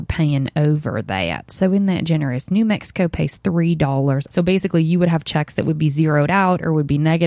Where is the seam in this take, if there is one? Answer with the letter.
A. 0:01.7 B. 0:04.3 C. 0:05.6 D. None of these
B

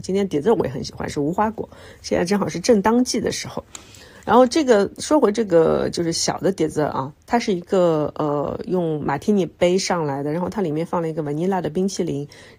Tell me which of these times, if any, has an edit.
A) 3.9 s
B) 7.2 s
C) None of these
C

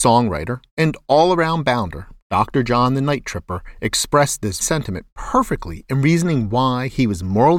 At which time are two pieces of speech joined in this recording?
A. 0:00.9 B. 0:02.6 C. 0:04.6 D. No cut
C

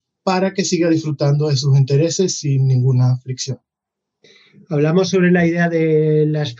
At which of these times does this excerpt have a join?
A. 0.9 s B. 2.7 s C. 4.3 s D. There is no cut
D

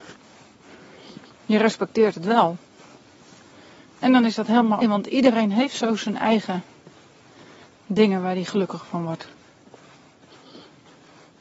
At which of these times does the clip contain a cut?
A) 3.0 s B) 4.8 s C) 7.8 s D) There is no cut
B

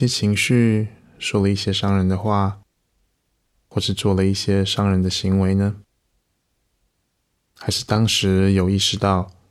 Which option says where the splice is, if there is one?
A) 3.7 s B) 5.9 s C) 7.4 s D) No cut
D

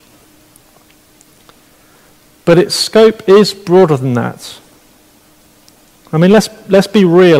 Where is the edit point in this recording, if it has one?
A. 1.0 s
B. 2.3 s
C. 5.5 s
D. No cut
D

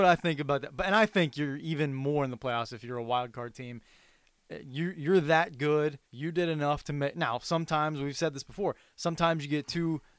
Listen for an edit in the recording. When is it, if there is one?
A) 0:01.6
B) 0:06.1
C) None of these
B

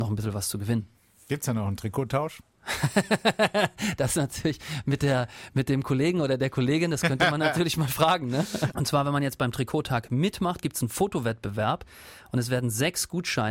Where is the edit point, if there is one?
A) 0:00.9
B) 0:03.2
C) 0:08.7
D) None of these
C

